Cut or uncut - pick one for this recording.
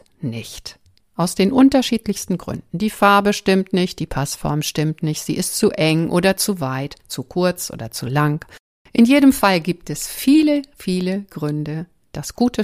uncut